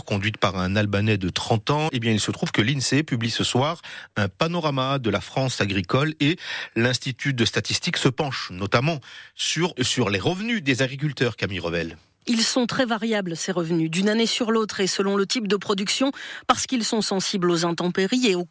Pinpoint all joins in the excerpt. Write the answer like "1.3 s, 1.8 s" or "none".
1.9 s, 9.8 s